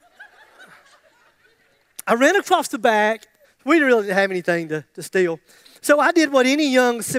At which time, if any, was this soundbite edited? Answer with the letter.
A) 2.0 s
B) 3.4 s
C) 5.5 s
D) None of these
B